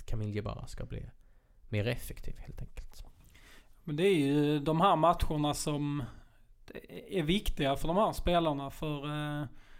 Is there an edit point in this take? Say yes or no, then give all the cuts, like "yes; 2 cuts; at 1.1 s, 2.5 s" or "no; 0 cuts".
no; 0 cuts